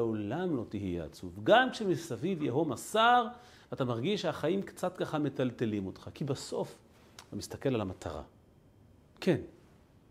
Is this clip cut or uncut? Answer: uncut